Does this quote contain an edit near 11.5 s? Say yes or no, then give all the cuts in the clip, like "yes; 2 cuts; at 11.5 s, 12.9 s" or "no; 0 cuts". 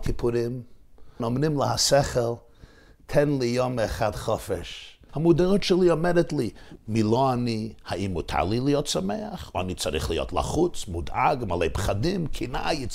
no; 3 cuts; at 1.2 s, 5.1 s, 6.8 s